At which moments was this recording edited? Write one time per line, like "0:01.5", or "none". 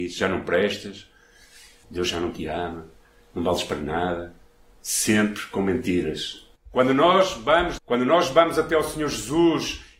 0:01.8
0:06.6
0:07.8